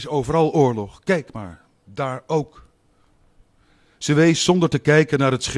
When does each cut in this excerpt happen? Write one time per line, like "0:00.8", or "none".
none